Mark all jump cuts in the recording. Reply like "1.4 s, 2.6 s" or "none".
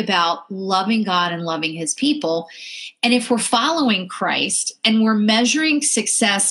none

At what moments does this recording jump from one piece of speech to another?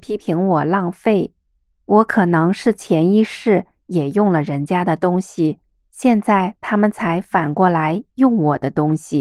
1.7 s

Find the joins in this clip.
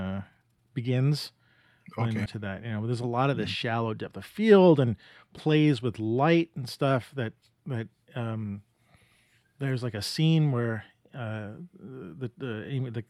2.3 s

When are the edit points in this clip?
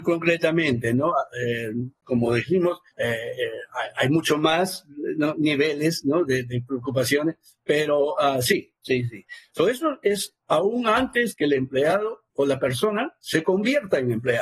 none

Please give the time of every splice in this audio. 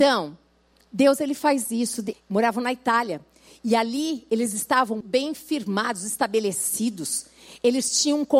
2.1 s, 5.0 s

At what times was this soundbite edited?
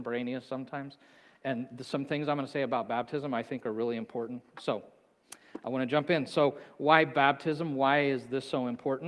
none

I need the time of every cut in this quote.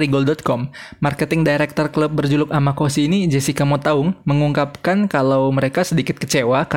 none

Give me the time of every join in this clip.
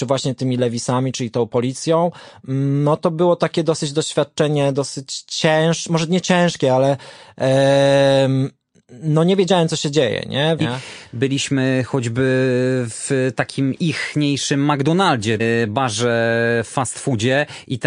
10.6 s, 15.4 s

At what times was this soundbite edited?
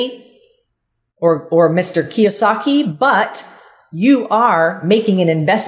none

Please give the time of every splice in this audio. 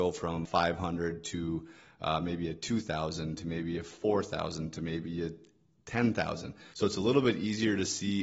6.7 s

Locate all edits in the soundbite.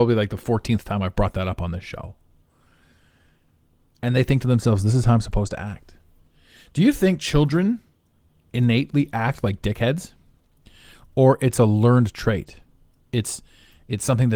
none

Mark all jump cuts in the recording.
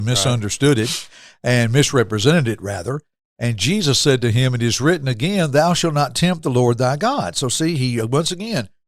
none

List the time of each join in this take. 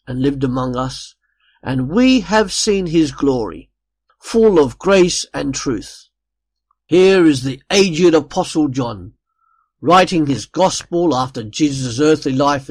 4.1 s, 6.8 s

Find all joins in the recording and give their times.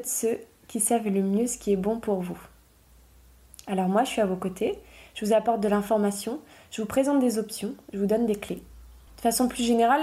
9.1 s

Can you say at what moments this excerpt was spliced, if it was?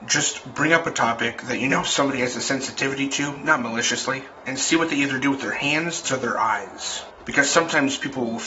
6.0 s

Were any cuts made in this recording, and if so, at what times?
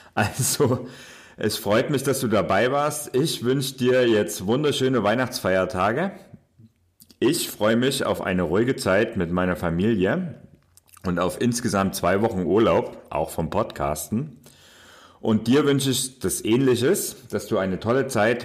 none

